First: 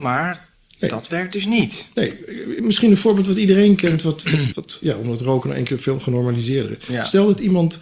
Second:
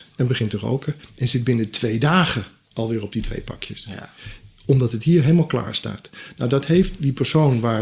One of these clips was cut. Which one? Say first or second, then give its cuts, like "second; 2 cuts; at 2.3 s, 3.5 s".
first; 1 cut; at 4.5 s